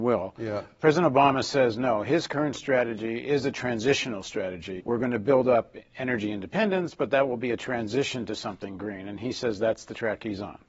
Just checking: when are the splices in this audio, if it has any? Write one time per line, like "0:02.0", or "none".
0:04.8